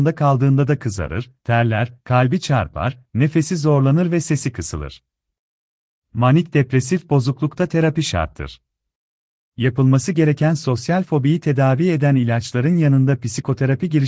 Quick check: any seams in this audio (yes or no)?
yes